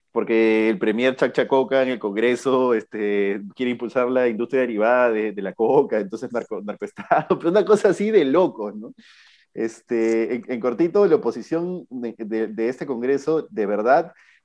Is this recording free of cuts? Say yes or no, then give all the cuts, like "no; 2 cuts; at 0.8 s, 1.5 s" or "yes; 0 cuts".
yes; 0 cuts